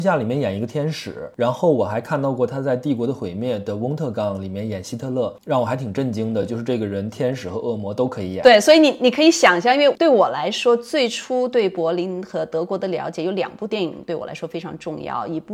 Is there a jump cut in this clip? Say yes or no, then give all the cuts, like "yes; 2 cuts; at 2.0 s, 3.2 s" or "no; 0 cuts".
no; 0 cuts